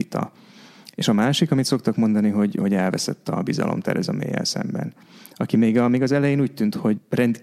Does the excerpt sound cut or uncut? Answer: uncut